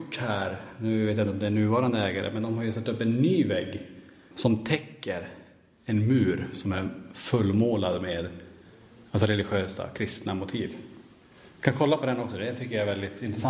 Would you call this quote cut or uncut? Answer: cut